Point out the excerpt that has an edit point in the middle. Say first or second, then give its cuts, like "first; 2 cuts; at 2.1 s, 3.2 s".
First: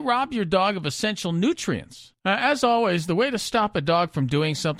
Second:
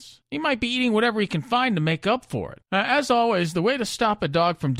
first; 1 cut; at 2.2 s